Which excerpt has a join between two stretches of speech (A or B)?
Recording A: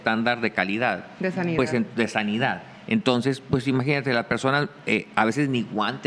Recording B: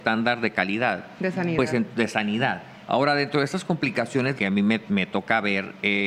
B